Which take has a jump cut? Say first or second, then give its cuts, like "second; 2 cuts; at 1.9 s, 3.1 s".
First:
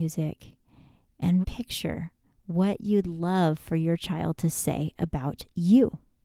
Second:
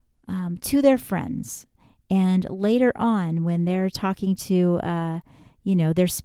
first; 1 cut; at 1.4 s